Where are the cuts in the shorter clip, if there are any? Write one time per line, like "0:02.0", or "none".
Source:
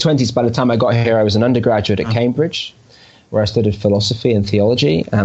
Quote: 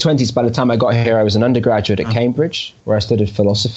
0:02.8